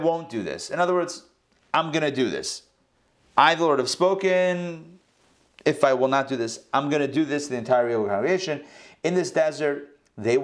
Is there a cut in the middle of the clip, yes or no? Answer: no